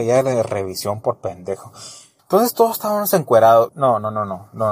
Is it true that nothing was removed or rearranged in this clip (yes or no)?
no